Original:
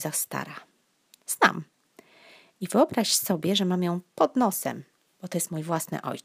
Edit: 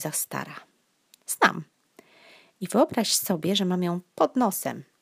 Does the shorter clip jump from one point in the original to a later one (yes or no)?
no